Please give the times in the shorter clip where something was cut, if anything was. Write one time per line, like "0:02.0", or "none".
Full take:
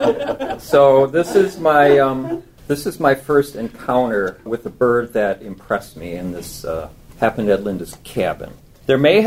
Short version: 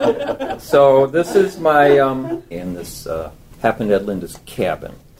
0:02.5